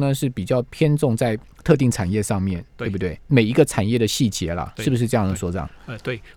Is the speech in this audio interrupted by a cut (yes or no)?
yes